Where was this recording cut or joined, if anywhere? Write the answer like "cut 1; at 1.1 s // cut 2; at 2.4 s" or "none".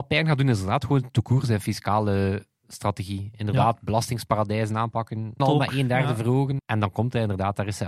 cut 1; at 5.4 s // cut 2; at 6.6 s